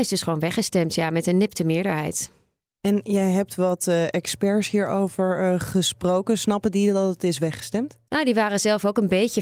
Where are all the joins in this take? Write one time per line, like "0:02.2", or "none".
none